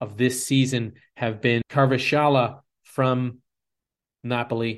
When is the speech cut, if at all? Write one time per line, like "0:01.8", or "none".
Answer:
0:01.6